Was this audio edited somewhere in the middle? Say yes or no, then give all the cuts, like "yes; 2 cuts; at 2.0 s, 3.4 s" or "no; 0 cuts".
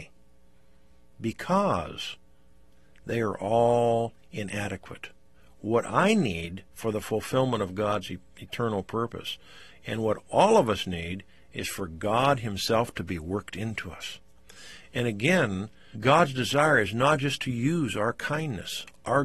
yes; 1 cut; at 15.9 s